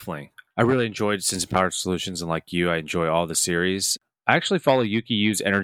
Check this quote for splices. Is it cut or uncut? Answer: uncut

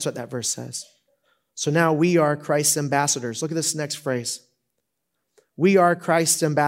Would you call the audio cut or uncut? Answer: uncut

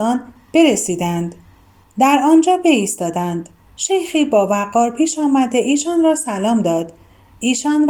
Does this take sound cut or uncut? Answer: uncut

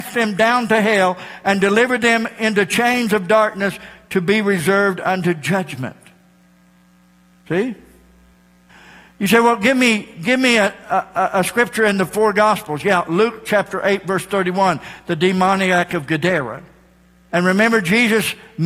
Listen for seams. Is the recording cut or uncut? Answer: cut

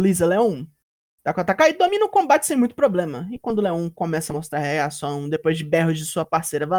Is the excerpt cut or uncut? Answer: uncut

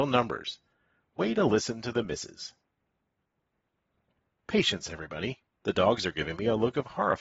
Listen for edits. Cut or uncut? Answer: cut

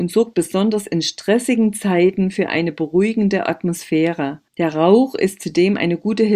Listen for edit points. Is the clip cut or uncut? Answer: cut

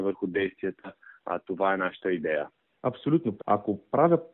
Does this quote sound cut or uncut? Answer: cut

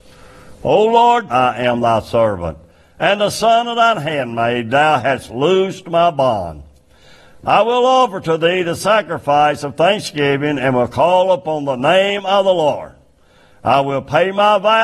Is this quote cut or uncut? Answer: cut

